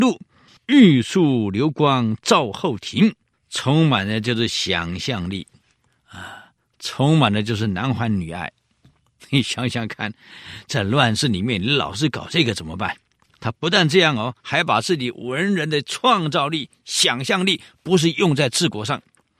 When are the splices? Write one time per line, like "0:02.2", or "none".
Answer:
0:03.3